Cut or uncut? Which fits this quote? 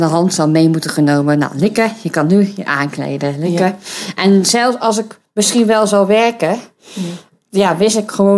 uncut